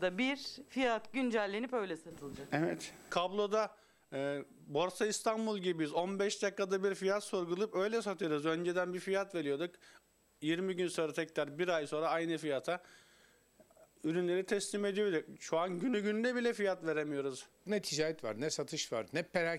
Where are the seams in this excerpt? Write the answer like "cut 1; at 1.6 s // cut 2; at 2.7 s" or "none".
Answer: none